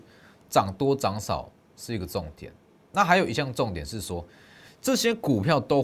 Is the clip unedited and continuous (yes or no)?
yes